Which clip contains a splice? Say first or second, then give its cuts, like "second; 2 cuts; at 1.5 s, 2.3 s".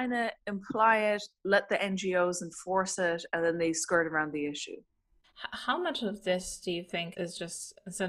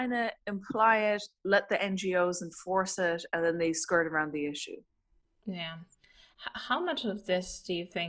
first; 2 cuts; at 5.2 s, 7.1 s